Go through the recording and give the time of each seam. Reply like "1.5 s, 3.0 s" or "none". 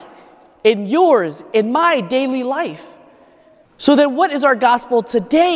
3.6 s